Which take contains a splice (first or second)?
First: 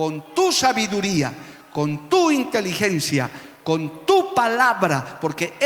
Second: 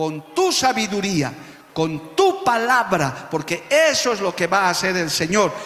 second